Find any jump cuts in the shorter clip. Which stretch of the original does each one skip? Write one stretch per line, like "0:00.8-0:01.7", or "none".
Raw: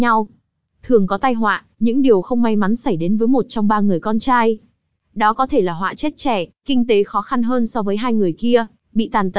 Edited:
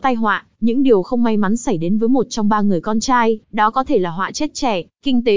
0:04.6-0:05.1

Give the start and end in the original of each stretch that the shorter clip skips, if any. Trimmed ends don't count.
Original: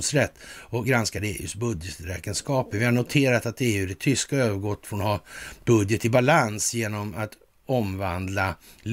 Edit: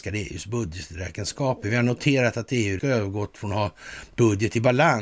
0:03.9-0:04.3

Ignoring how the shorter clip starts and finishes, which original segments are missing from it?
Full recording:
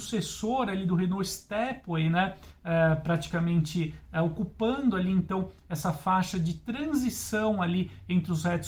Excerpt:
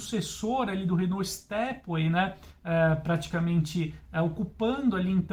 none

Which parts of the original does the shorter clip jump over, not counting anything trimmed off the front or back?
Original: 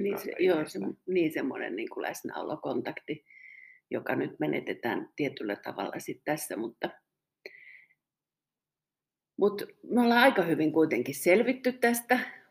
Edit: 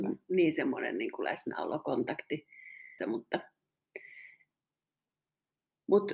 0:03.8-0:06.5

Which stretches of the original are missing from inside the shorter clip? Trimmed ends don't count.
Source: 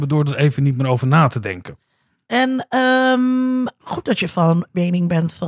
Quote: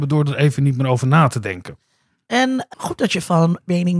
0:02.7-0:03.8

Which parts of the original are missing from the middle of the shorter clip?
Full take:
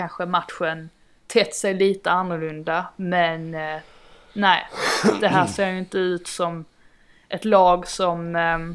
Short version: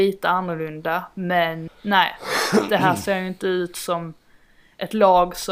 0:03.5-0:04.2

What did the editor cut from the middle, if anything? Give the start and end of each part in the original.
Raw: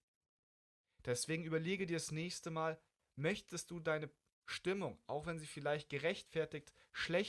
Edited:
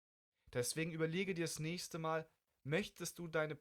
none

